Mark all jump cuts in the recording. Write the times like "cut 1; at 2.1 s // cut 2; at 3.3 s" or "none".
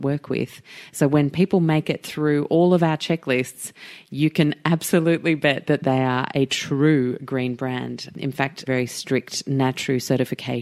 cut 1; at 8.7 s